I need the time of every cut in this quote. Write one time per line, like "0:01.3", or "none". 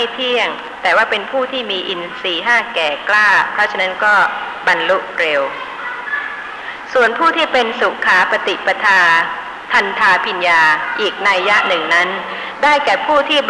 0:10.4